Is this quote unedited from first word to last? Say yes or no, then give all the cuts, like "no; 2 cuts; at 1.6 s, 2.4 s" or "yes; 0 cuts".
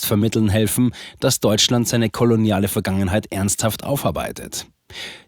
yes; 0 cuts